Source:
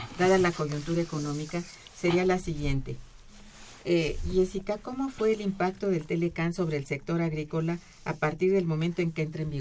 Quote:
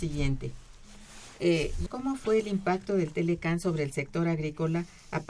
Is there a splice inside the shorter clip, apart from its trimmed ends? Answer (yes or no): yes